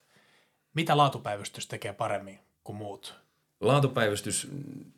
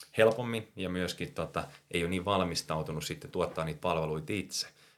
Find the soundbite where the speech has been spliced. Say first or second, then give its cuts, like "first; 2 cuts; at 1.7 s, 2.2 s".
first; 1 cut; at 3.4 s